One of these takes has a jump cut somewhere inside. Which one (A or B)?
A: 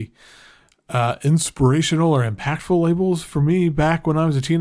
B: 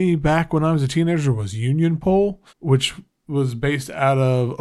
B